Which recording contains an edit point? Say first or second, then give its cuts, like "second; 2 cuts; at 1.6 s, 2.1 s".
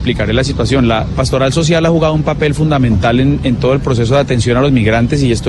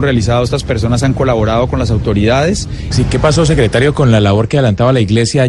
second; 1 cut; at 2.9 s